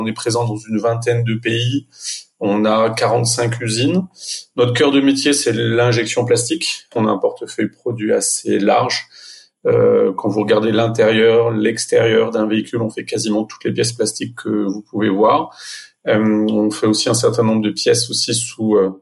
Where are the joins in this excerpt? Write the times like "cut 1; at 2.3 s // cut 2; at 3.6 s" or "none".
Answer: cut 1; at 7.0 s